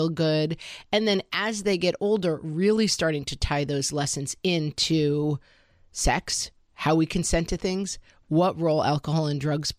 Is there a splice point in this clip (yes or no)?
no